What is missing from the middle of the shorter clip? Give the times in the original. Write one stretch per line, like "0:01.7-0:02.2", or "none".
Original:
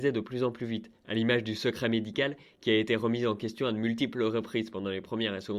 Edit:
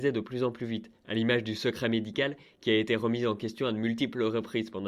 none

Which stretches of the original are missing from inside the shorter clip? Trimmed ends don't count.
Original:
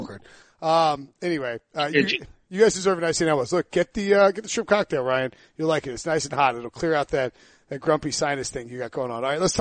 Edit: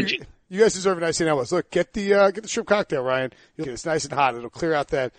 0:05.6-0:05.8

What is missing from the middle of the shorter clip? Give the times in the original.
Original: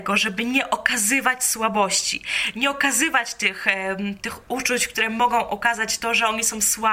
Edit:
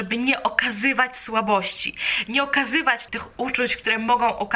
0:03.4-0:04.2

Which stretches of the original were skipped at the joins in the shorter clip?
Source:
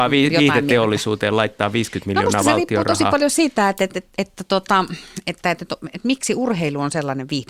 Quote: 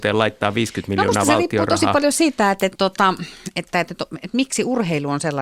0:03.9-0:04.5

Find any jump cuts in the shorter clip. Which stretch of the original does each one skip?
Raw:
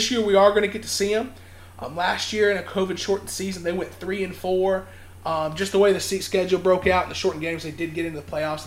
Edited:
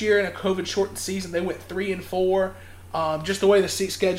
none

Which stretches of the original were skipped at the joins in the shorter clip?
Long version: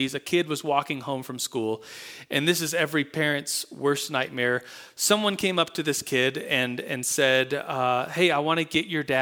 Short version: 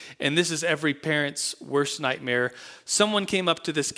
none

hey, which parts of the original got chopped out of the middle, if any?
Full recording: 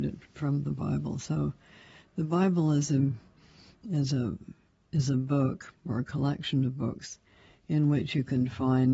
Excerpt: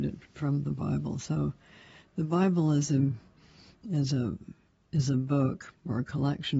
none

